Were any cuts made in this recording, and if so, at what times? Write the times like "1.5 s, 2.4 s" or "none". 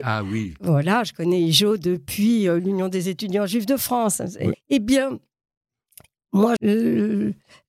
4.5 s, 6.6 s